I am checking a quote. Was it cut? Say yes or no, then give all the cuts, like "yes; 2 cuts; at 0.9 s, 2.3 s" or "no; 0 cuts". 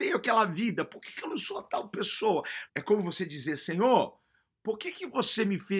yes; 1 cut; at 2.7 s